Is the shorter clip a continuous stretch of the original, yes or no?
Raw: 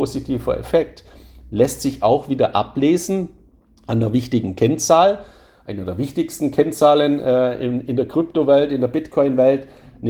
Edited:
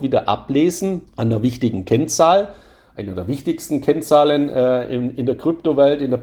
no